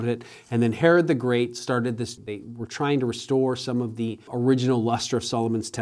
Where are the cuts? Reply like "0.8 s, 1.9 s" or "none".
2.2 s, 4.3 s